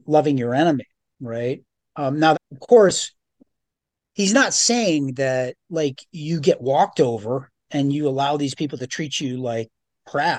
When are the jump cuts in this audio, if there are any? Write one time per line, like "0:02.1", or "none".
0:02.3

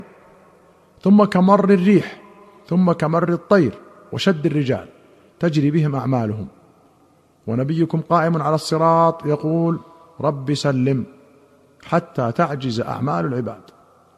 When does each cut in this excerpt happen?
0:10.6

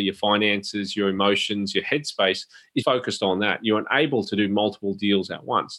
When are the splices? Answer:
0:02.8

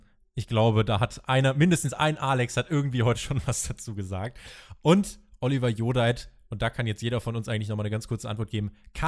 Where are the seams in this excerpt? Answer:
none

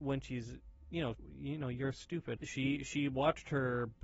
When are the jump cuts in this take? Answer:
0:01.1
0:02.4

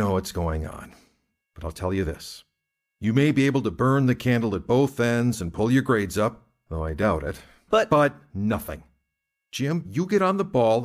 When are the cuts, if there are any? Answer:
0:01.4
0:07.7

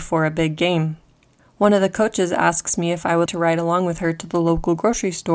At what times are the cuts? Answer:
0:03.3

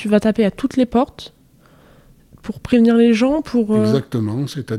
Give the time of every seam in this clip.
none

